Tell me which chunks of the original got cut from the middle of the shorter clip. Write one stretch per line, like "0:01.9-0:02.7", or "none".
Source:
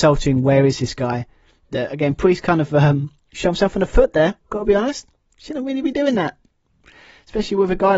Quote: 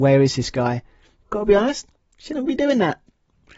0:01.7-0:04.4
0:05.7-0:05.8